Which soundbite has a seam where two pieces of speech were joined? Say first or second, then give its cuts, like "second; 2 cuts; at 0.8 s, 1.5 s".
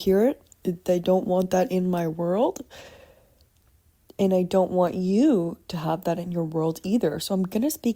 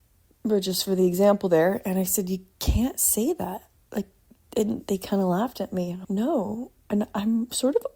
second; 1 cut; at 6.0 s